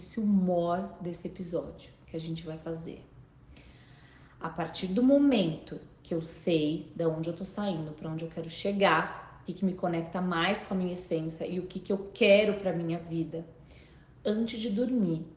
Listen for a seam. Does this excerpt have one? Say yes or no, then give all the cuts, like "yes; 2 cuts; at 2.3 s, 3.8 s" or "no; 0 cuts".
yes; 1 cut; at 9.5 s